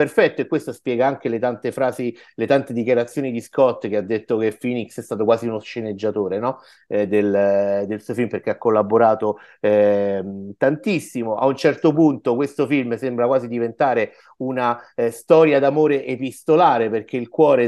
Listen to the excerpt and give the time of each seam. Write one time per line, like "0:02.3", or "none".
none